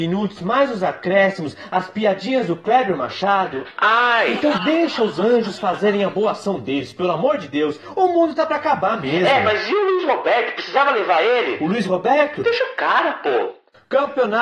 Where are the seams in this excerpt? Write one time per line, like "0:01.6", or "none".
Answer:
0:04.6